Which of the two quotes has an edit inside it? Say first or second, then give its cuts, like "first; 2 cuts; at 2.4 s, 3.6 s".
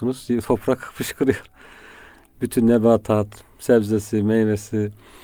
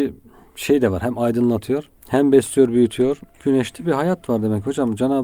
second; 2 cuts; at 2.0 s, 3.3 s